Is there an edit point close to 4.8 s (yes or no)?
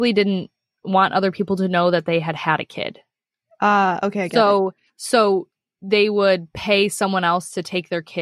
no